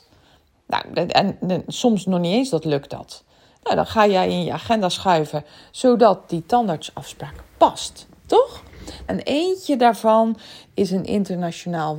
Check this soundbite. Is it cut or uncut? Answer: cut